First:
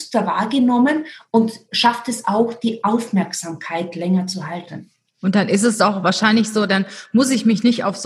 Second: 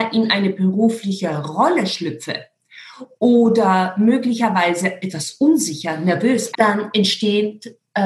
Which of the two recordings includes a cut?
second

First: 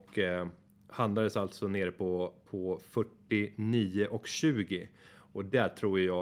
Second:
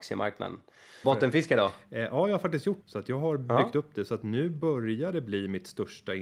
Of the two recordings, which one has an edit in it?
second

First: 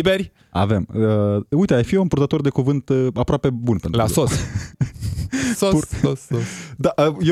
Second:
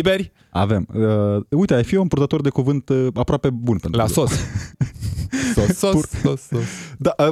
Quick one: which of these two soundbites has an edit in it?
first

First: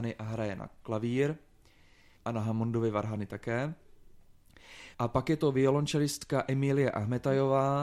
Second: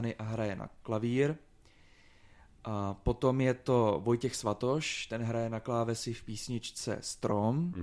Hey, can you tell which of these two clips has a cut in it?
first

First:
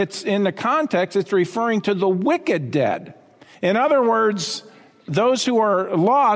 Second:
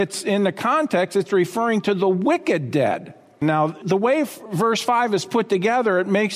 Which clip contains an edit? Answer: second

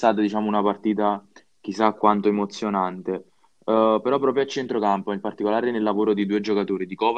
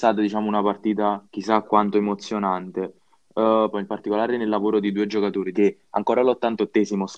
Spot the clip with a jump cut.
second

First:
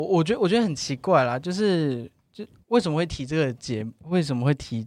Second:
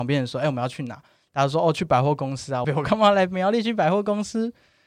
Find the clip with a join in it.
second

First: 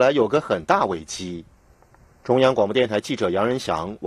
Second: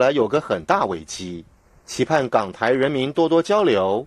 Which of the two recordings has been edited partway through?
first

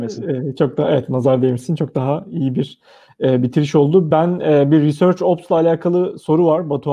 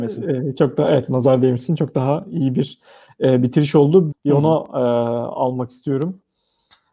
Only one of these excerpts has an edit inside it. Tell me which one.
second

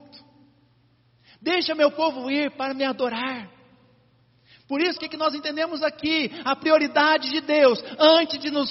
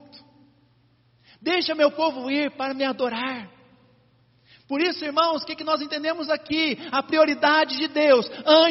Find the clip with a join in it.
first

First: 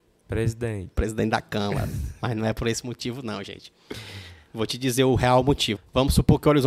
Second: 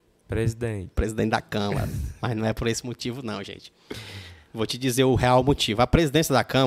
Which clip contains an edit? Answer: first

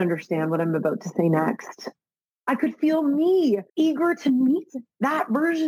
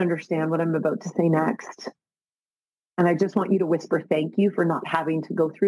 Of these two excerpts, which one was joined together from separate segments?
first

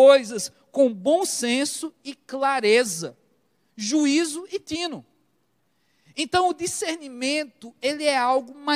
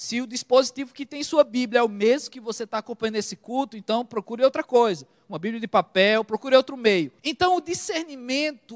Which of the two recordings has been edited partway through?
second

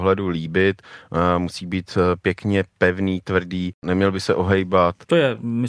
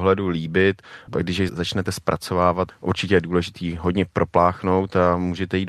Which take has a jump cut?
second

